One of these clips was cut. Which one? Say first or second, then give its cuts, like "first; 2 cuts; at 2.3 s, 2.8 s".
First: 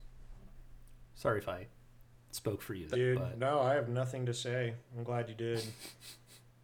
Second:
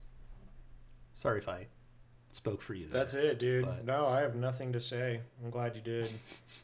first; 1 cut; at 2.9 s